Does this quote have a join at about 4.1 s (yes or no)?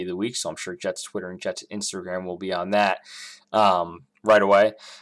yes